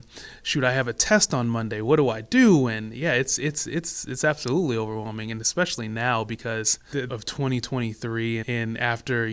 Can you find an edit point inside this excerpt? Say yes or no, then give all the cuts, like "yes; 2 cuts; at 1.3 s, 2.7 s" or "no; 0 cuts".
yes; 2 cuts; at 7.1 s, 8.4 s